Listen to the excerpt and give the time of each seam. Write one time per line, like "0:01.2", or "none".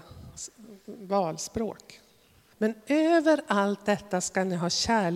0:02.5

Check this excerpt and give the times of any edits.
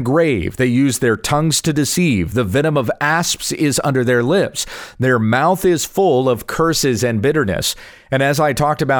none

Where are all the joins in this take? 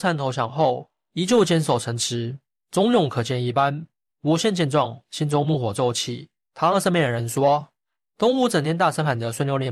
0:04.1

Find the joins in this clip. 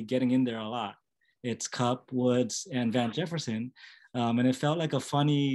0:01.3

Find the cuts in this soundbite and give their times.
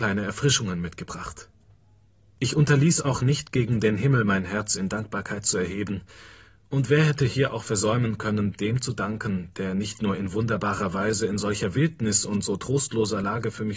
0:02.3

